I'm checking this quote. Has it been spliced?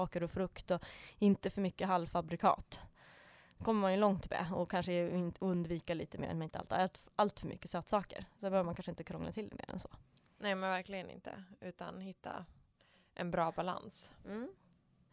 no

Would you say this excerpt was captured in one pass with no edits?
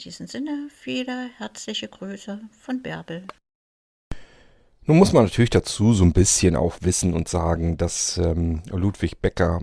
yes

